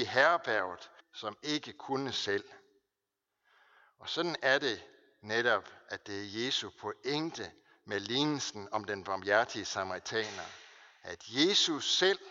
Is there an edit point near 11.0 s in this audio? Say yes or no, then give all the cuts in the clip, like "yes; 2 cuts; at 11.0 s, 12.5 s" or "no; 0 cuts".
no; 1 cut; at 1.0 s